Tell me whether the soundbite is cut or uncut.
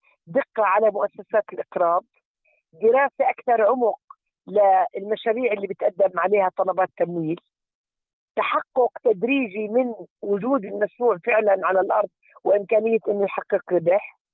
uncut